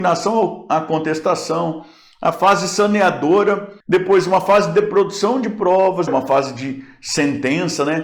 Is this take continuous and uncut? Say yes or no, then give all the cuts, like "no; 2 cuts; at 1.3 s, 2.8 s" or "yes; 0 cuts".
no; 2 cuts; at 3.8 s, 6.1 s